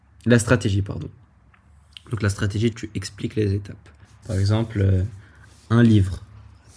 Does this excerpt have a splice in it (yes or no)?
yes